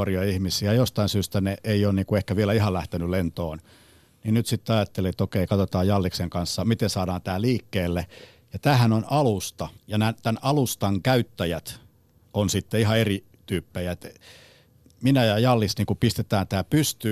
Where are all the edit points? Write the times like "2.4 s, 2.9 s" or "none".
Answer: 9.8 s